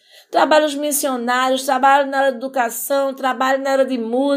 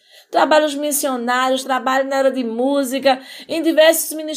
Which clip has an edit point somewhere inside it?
second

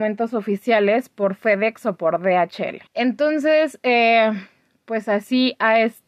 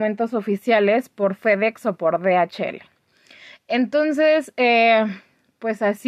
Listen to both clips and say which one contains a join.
first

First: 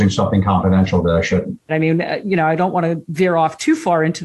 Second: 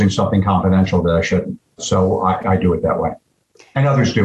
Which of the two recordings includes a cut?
first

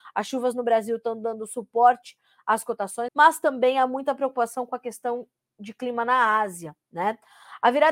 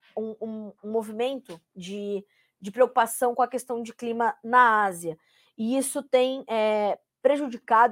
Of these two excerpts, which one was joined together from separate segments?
first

